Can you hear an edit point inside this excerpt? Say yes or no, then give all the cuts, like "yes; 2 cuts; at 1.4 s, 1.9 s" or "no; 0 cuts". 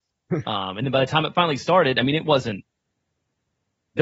no; 0 cuts